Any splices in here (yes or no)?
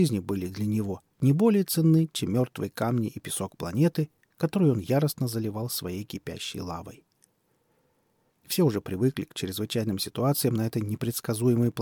yes